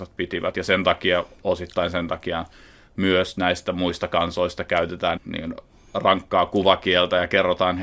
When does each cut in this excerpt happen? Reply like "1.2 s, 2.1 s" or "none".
5.2 s